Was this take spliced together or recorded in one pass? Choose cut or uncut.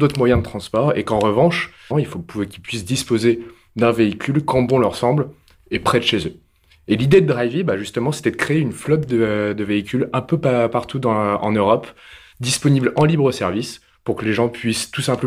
cut